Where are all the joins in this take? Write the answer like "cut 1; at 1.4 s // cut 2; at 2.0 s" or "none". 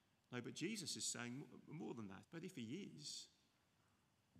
cut 1; at 2.2 s